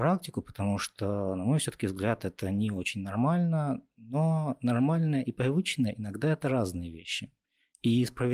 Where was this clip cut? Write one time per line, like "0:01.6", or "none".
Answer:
none